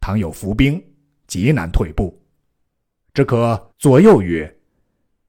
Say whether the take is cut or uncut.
cut